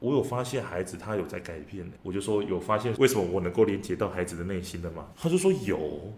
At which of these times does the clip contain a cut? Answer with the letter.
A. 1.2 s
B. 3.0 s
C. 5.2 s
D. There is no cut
B